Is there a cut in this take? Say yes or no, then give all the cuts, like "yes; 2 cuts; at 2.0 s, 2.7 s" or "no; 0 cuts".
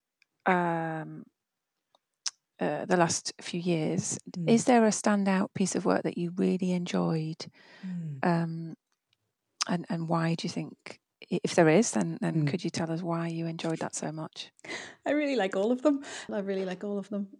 yes; 1 cut; at 16.3 s